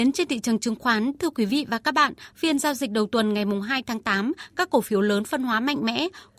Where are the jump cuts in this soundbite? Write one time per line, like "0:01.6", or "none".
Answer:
none